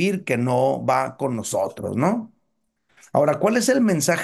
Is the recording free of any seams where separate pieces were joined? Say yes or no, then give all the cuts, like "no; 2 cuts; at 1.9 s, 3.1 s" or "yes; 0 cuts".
yes; 0 cuts